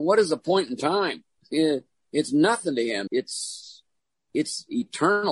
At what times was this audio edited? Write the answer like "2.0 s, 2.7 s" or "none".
3.1 s